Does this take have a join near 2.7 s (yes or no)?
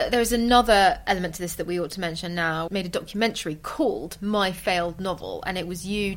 yes